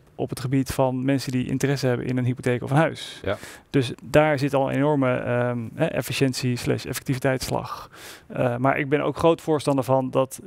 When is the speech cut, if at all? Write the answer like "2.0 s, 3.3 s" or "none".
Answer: 3.9 s, 8.2 s